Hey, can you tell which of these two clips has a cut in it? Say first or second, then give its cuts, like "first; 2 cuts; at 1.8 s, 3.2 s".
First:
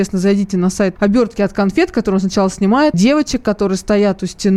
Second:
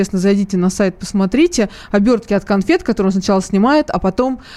first; 2 cuts; at 1.0 s, 2.9 s